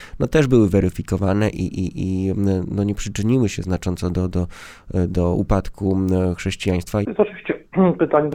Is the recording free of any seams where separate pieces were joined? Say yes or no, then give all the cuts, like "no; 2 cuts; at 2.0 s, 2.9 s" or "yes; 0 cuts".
no; 1 cut; at 7.0 s